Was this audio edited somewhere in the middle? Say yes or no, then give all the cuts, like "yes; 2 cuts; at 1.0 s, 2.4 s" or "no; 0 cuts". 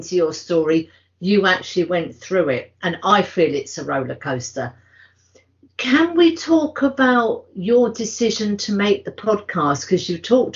no; 0 cuts